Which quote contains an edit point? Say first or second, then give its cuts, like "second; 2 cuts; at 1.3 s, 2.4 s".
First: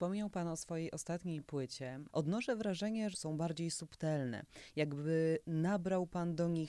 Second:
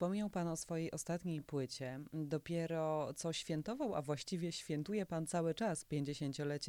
first; 2 cuts; at 2.1 s, 3.1 s